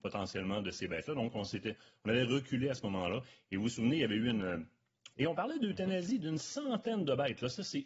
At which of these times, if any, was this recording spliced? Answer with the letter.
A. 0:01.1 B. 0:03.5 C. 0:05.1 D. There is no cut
C